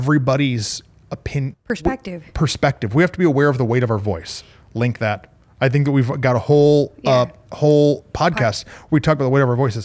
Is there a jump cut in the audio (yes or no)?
yes